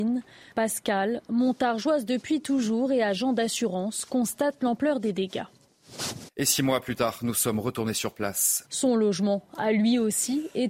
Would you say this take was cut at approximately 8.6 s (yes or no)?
yes